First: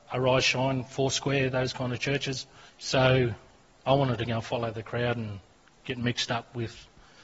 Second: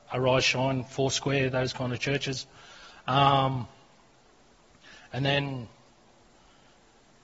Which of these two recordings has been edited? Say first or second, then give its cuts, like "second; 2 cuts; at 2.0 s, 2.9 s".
first; 1 cut; at 2.7 s